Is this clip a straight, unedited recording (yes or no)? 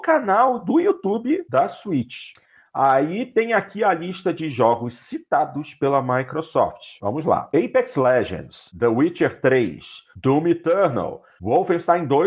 yes